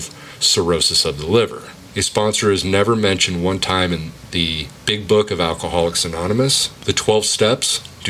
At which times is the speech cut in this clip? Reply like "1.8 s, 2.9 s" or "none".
1.9 s